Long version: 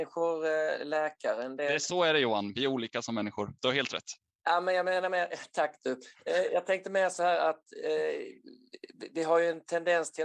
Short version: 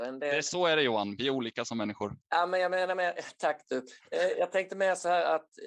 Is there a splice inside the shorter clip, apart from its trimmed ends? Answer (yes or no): yes